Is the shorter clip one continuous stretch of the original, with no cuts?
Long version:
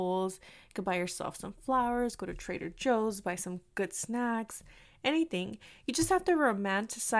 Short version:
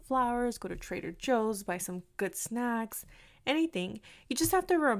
yes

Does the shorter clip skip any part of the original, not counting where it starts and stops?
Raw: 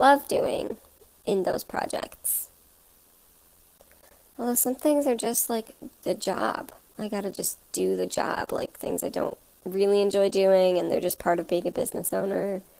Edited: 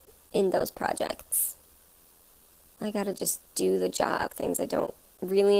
yes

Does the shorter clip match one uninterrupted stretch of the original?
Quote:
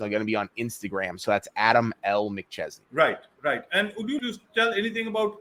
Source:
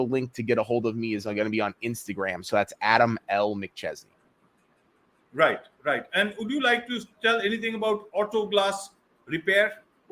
no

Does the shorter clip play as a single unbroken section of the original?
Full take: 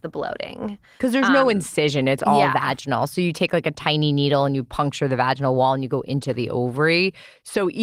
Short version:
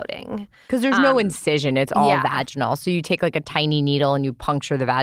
yes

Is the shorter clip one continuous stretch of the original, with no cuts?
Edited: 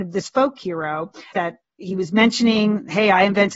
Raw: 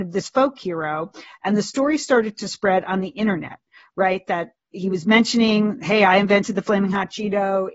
no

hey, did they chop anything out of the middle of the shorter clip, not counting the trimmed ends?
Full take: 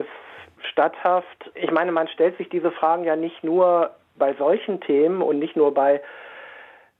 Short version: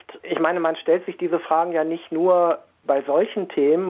no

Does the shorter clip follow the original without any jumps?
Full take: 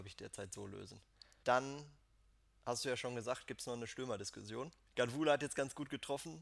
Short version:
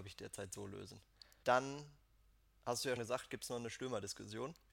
no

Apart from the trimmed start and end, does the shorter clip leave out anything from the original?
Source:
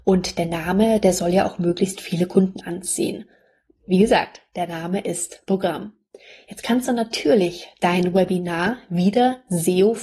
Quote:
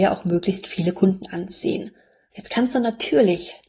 yes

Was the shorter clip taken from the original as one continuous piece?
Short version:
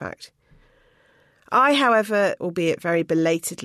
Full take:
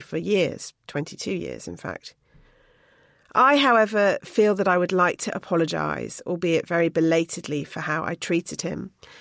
no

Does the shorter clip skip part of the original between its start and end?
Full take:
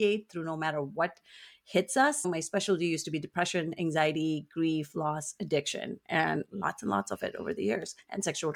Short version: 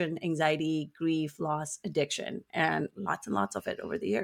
no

